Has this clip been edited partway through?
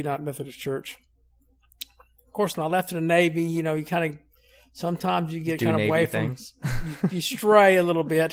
yes; 1 cut; at 2.5 s

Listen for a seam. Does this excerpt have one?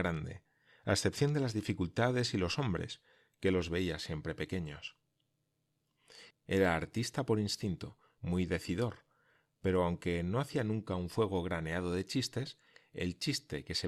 yes; 2 cuts; at 6.3 s, 8.2 s

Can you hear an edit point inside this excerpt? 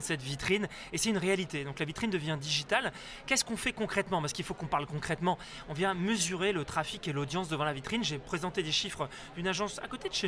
no; 0 cuts

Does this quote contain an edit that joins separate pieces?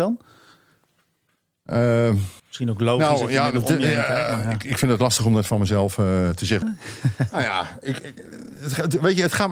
yes; 2 cuts; at 2.4 s, 6.6 s

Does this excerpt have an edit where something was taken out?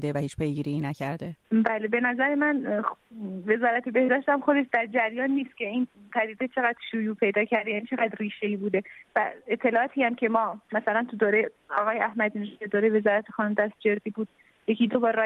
no; 0 cuts

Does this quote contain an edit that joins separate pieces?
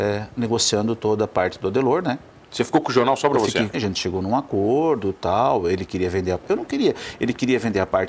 yes; 1 cut; at 3.7 s

